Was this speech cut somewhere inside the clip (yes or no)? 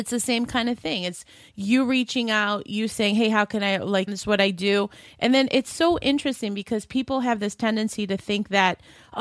yes